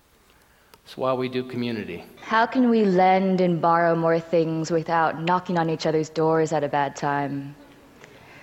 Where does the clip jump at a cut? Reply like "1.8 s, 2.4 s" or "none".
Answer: 2.2 s